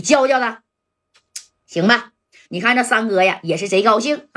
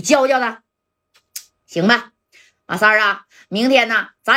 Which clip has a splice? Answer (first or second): first